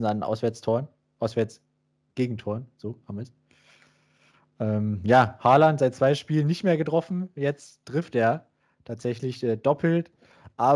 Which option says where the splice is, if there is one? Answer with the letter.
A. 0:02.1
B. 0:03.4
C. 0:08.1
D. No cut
D